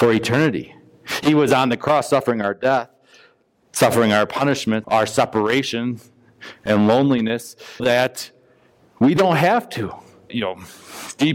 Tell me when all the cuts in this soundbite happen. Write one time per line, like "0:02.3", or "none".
0:04.8
0:07.8
0:10.3